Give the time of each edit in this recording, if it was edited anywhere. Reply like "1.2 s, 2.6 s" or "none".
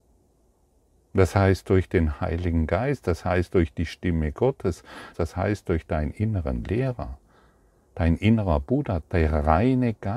5.1 s, 9.0 s